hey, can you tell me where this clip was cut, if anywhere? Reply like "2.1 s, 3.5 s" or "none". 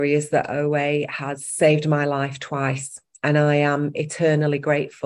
none